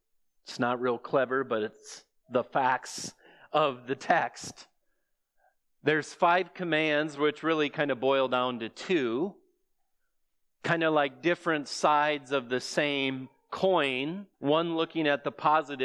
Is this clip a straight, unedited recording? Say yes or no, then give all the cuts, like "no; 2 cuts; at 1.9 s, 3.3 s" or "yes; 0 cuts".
no; 1 cut; at 14.3 s